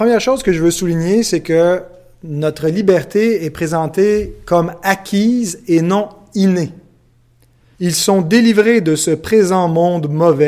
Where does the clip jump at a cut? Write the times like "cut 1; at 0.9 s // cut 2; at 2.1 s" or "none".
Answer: cut 1; at 7.7 s